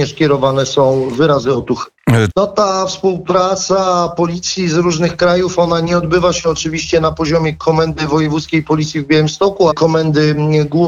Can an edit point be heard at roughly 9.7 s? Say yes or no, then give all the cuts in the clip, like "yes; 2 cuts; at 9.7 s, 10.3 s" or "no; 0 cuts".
yes; 2 cuts; at 2.3 s, 9.7 s